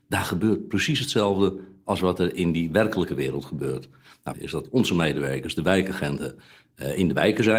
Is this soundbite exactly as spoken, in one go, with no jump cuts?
no; 1 cut; at 4.3 s

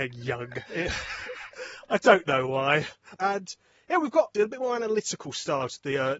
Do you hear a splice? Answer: yes; 2 cuts; at 3.2 s, 4.3 s

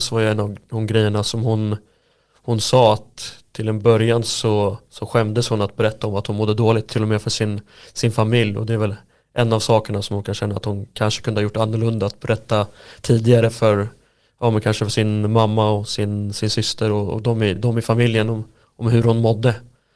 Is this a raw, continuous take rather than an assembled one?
yes; 0 cuts

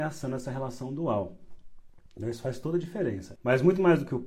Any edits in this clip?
yes; 1 cut; at 3.4 s

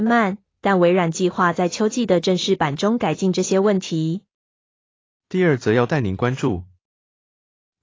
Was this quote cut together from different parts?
no; 0 cuts

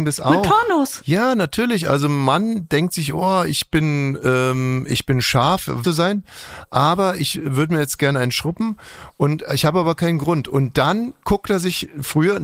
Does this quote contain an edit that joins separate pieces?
yes; 1 cut; at 5.8 s

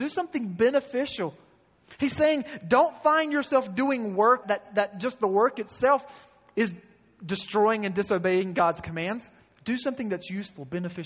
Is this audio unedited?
no; 1 cut; at 4.4 s

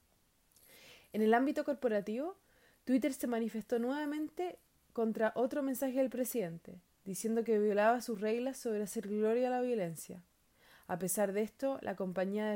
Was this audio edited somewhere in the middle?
no; 0 cuts

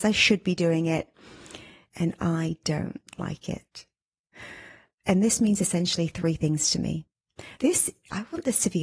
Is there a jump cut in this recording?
yes; 2 cuts; at 4.9 s, 7.6 s

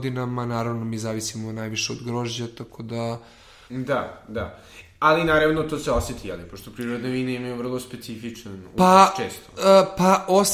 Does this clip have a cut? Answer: yes; 1 cut; at 3.7 s

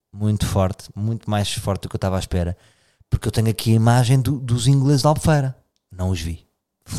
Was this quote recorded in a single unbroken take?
yes; 0 cuts

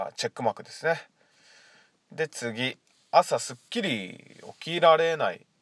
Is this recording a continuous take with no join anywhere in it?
yes; 0 cuts

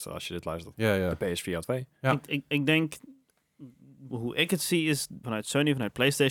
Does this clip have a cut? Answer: yes; 2 cuts; at 4.1 s, 5.2 s

